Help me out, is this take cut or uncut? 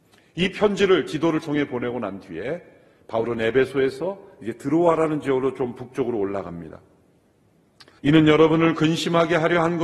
cut